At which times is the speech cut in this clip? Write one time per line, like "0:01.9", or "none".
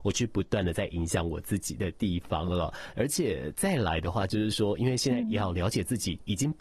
none